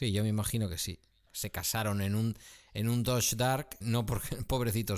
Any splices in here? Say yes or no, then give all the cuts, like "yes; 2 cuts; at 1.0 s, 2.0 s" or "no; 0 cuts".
yes; 2 cuts; at 1.3 s, 3.8 s